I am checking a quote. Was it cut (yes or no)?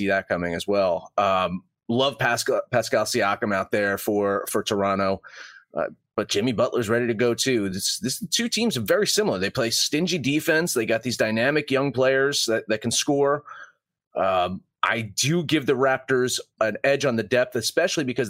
no